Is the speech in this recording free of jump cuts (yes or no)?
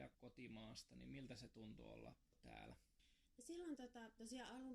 yes